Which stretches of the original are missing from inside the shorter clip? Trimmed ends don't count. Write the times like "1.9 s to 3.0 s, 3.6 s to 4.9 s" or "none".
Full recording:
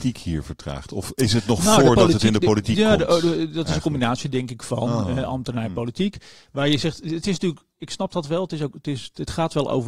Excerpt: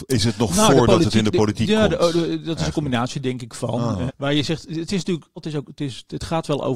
5.2 s to 6.4 s, 7.7 s to 8.4 s